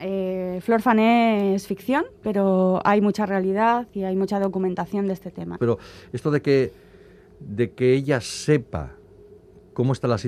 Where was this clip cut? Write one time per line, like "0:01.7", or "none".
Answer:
0:05.6